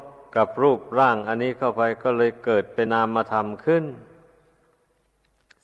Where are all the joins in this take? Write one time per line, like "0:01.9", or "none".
0:02.9